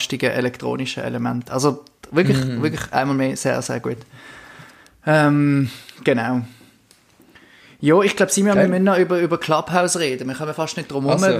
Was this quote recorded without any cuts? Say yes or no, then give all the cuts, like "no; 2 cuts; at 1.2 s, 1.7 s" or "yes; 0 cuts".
yes; 0 cuts